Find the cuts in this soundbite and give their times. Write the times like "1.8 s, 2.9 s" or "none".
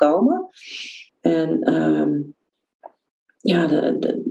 1.1 s